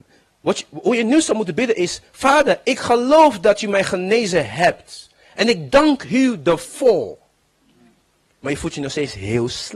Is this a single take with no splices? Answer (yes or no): no